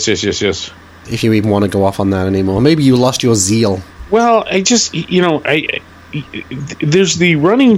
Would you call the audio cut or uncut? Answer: cut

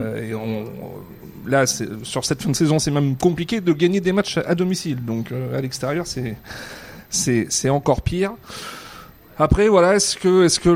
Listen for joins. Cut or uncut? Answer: uncut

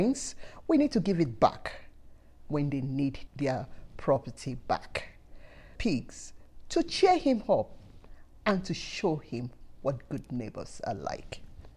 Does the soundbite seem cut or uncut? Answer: cut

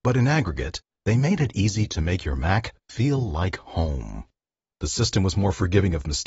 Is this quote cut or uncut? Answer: cut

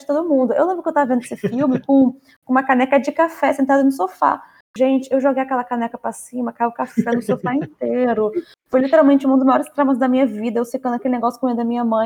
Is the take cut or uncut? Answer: cut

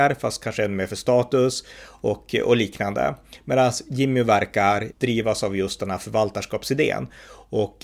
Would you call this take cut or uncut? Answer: cut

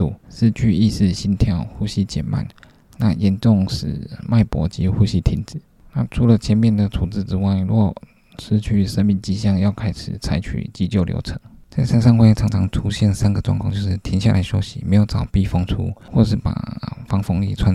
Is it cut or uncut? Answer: uncut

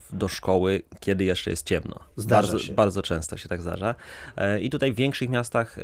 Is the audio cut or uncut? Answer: uncut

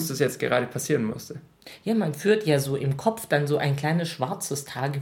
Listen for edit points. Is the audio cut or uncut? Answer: uncut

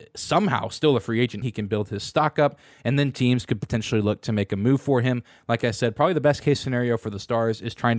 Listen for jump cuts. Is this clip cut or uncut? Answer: cut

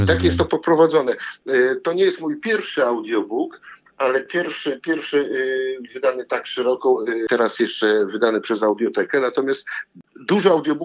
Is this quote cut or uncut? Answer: uncut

